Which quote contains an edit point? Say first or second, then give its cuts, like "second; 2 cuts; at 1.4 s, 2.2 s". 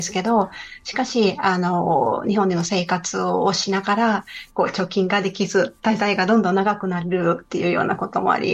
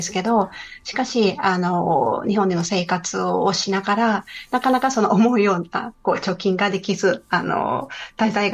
first; 2 cuts; at 4.5 s, 5.8 s